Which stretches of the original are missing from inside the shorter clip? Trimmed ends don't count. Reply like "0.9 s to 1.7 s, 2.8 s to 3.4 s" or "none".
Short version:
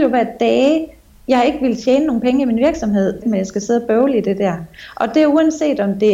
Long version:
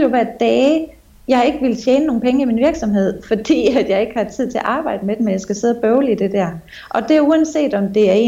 3.2 s to 5.2 s